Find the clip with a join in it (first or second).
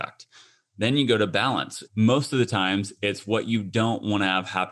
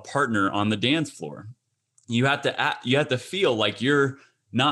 first